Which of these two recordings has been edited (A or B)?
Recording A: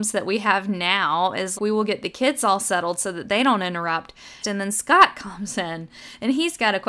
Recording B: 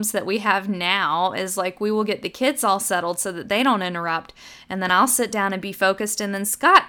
A